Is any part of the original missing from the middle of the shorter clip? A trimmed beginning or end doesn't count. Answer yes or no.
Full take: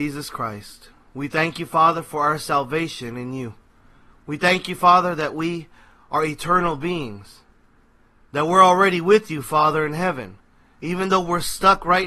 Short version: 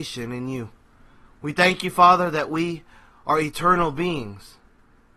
no